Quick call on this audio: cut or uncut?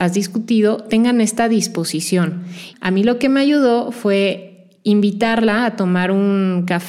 cut